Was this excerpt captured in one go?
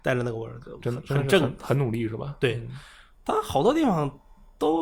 yes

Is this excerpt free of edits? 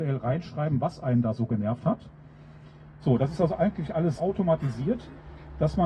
no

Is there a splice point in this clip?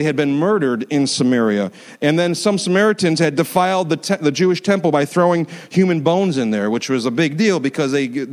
no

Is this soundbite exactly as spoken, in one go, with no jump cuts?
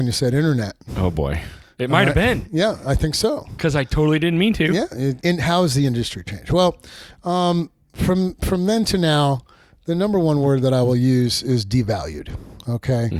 no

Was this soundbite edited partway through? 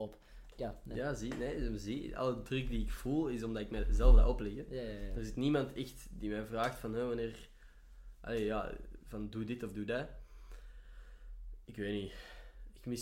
no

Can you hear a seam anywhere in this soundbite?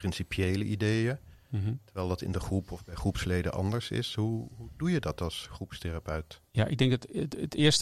no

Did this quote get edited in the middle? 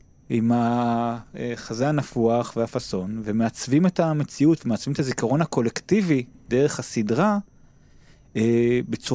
no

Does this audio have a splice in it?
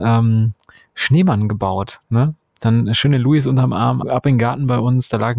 yes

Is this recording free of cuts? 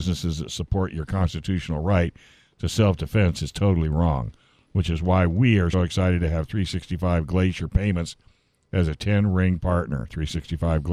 no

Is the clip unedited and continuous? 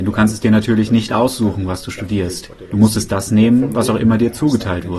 yes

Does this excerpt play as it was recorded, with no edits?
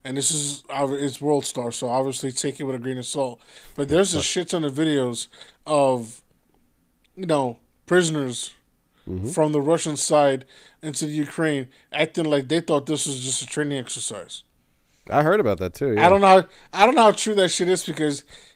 yes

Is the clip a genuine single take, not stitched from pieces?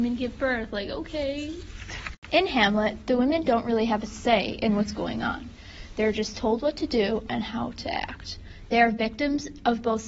yes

